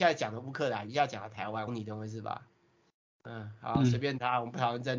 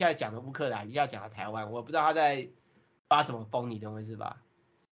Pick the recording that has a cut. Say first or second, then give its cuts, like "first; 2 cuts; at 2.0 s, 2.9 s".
first; 1 cut; at 1.7 s